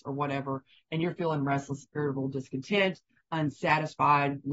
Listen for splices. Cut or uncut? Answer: uncut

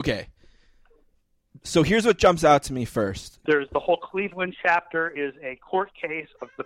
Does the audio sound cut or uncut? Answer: cut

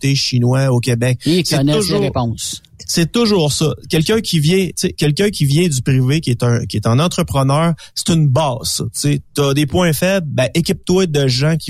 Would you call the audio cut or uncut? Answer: uncut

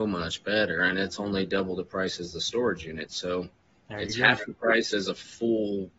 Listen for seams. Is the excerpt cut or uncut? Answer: uncut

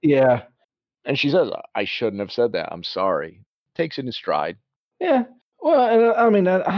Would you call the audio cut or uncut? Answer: uncut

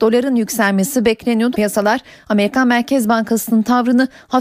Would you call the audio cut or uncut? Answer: cut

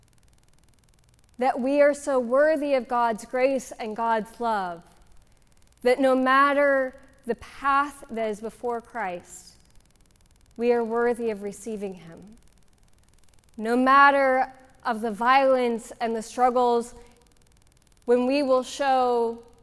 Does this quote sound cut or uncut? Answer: uncut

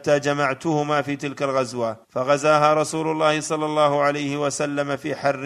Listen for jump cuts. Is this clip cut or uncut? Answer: cut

